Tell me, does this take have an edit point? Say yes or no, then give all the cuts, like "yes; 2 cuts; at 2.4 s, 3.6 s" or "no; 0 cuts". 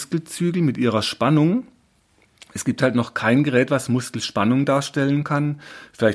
no; 0 cuts